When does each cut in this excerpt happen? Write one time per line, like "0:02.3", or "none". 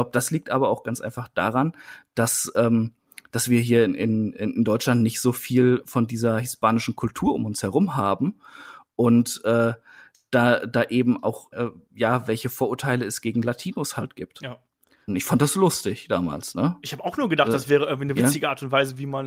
0:11.5
0:15.1

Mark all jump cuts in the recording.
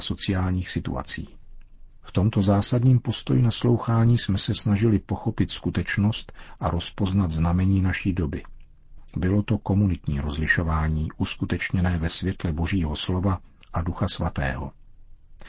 none

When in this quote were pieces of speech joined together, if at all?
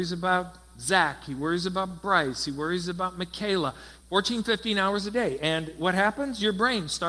0:04.0

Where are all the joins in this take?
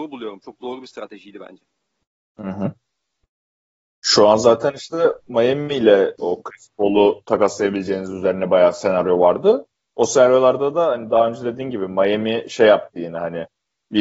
none

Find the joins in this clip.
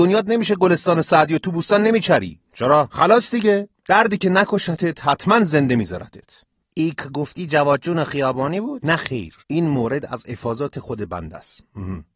0:09.4

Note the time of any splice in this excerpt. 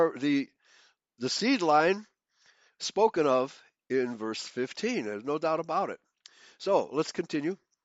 none

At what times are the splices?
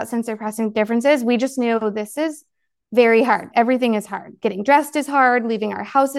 none

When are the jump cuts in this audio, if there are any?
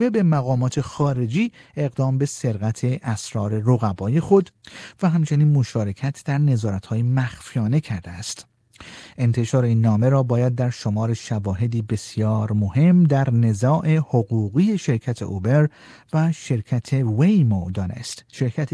none

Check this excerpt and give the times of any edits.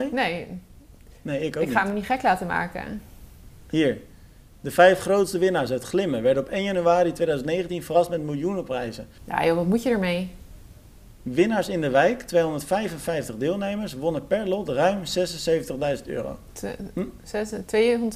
0:09.2

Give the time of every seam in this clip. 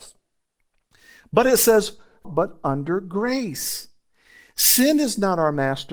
0:02.2

